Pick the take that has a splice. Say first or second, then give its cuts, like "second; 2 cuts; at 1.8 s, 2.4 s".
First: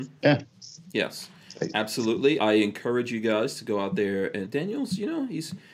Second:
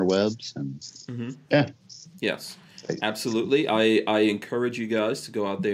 first; 2 cuts; at 2.4 s, 4.5 s